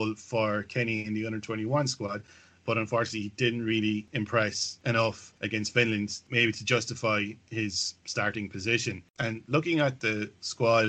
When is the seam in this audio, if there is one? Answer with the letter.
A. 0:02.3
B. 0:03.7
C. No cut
C